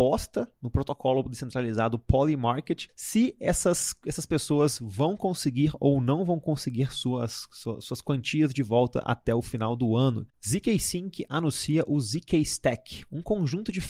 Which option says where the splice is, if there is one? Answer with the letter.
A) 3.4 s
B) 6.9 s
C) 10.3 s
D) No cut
C